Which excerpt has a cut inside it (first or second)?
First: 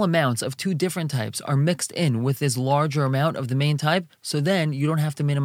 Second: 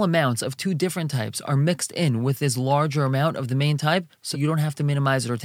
second